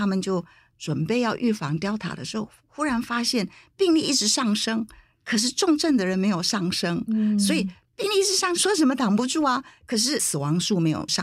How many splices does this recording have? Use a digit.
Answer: 1